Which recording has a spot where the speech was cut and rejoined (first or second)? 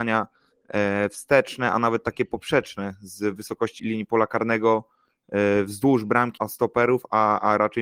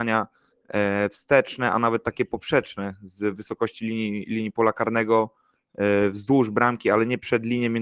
first